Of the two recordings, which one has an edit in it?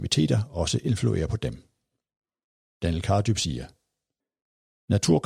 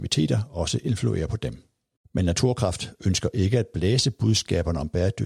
second; 1 cut; at 2.0 s

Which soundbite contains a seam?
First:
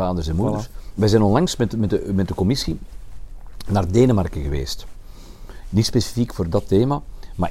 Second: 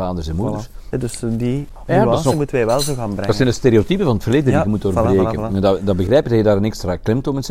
second; 1 cut; at 0.9 s

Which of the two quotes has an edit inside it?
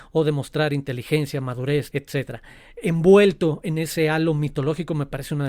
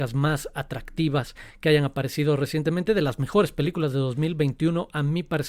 first; 1 cut; at 1.9 s

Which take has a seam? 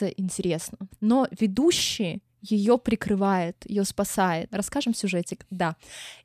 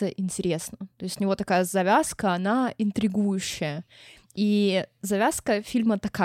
first; 2 cuts; at 0.9 s, 4.5 s

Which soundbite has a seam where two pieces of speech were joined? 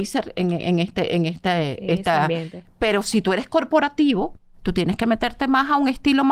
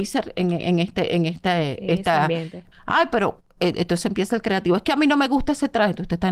second; 1 cut; at 2.7 s

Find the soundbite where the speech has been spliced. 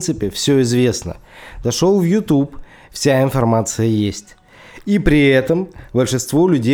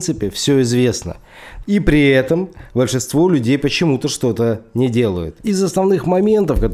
second; 2 cuts; at 1.6 s, 5.4 s

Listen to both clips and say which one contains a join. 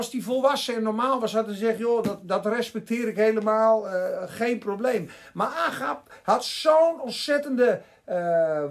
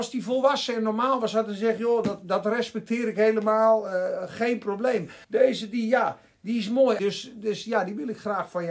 second; 2 cuts; at 5.2 s, 7.0 s

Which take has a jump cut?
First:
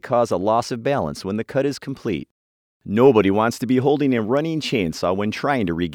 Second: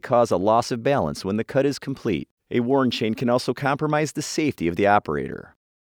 second; 1 cut; at 2.4 s

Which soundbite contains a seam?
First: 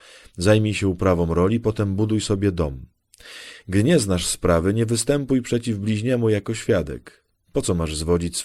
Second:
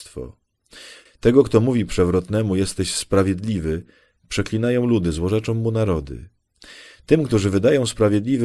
second; 1 cut; at 1.1 s

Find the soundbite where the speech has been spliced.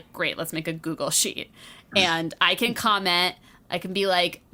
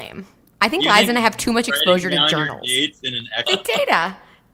second; 1 cut; at 3.4 s

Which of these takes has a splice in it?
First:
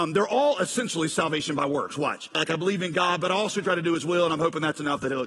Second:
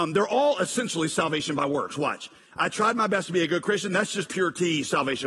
first; 1 cut; at 2.3 s

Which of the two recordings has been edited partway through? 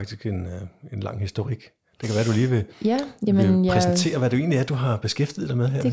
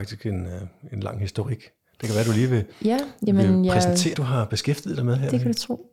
second; 1 cut; at 4.1 s

